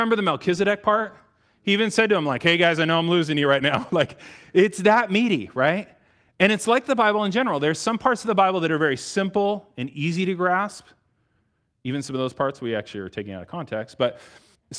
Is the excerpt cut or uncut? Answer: uncut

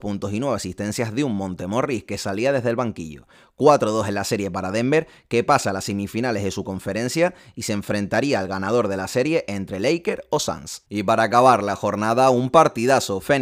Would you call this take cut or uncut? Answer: uncut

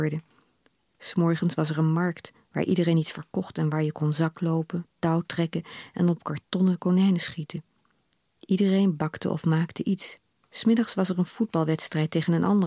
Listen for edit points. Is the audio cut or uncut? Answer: cut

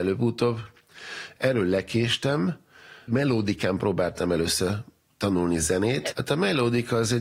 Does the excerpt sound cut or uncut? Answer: cut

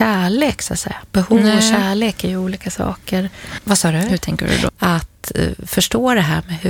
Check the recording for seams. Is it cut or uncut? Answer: cut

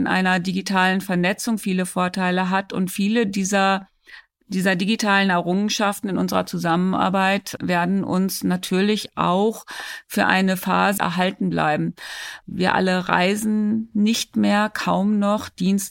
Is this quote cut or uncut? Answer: cut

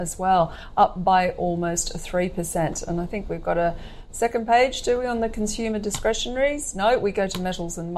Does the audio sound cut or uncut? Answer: uncut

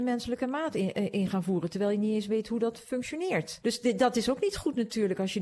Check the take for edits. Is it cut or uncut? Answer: cut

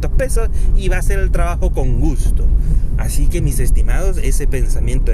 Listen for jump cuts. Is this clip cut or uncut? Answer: uncut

